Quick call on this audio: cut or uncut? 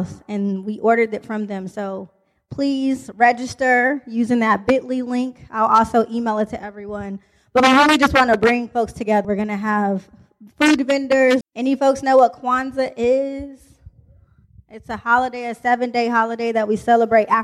cut